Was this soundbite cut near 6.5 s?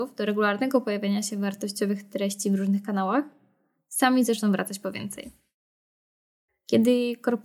yes; 1 cut; at 6.5 s

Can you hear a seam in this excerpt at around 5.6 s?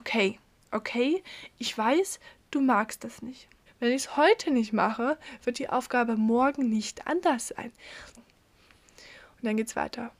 no; 2 cuts; at 3.7 s, 8.2 s

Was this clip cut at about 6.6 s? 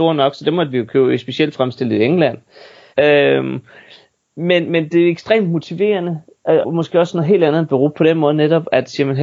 yes; 2 cuts; at 2.9 s, 6.6 s

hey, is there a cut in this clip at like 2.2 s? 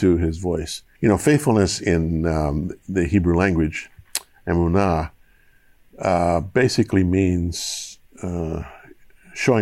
no; 1 cut; at 0.9 s

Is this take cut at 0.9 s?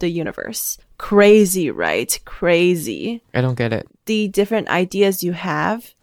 no; 1 cut; at 3.9 s

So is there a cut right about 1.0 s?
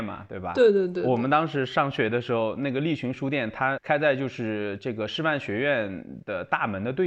no; 1 cut; at 3.8 s

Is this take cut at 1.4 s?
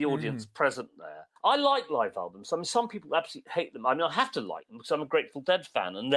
yes; 1 cut; at 1.4 s

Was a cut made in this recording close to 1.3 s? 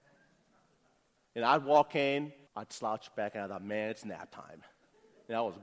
no; 1 cut; at 2.5 s

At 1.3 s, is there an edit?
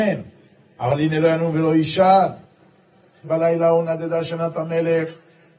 no; 1 cut; at 3.2 s

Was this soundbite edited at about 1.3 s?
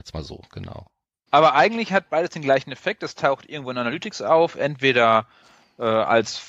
yes; 1 cut; at 1.3 s

